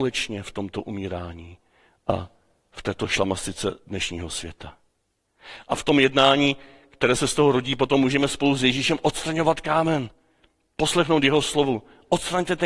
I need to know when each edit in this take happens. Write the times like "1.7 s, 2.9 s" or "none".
none